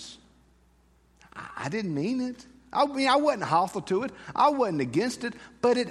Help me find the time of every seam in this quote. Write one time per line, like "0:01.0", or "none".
none